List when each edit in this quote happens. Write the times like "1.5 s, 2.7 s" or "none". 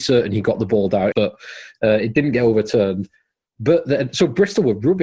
1.1 s